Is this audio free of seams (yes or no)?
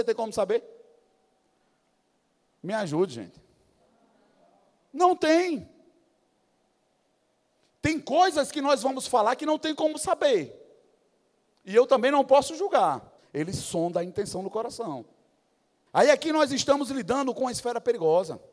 no